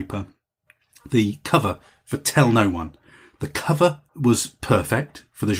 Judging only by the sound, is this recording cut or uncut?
cut